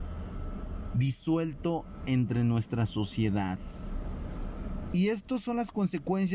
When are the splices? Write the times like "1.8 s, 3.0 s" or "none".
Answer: 4.9 s

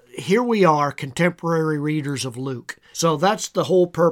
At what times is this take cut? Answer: 2.9 s

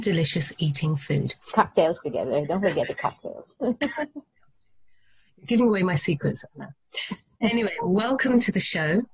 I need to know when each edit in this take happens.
1.5 s

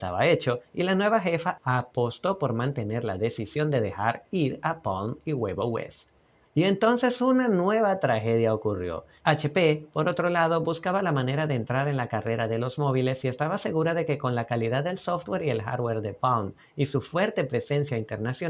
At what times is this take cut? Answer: 6.4 s, 9.2 s

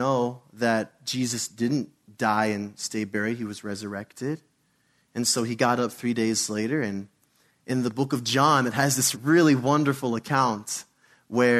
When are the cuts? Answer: 9.1 s

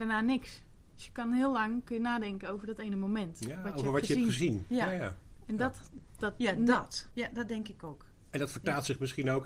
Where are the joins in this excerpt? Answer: 7.1 s

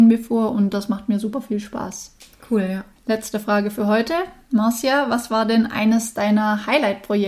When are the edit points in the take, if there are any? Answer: none

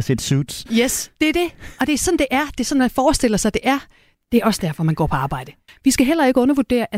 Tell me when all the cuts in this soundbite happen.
4.1 s, 5.7 s

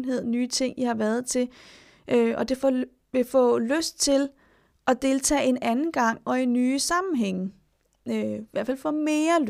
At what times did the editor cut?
none

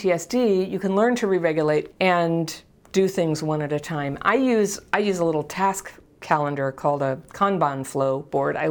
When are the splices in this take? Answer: 1.9 s

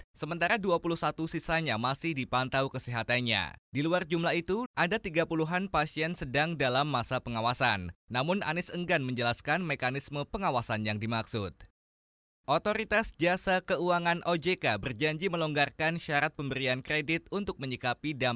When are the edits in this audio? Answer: 4.7 s

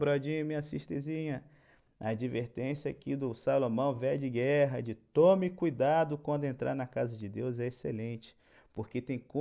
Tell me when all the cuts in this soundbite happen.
none

